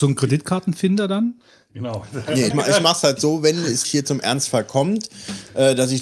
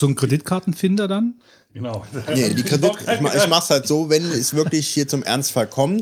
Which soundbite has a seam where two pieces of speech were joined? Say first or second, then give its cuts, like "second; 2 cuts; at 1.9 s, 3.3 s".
first; 2 cuts; at 2.5 s, 3.8 s